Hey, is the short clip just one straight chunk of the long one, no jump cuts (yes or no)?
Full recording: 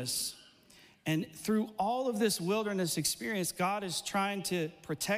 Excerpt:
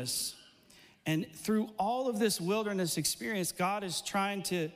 yes